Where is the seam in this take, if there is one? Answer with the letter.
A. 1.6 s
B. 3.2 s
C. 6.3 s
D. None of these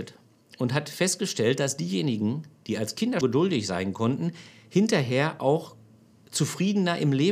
B